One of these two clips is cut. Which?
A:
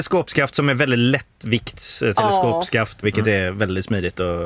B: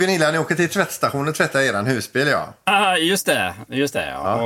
A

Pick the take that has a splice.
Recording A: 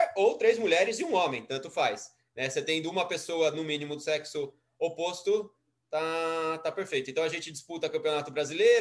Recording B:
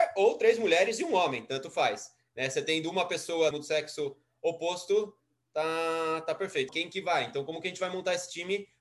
B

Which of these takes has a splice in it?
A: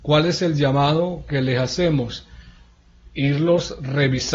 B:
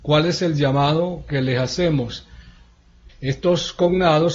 B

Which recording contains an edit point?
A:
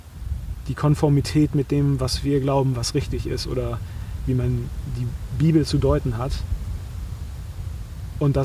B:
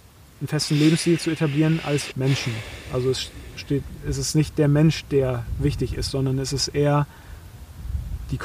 B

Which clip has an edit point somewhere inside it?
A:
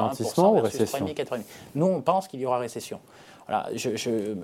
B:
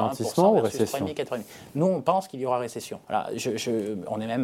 B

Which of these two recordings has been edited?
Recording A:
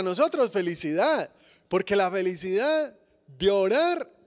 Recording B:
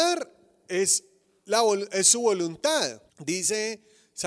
B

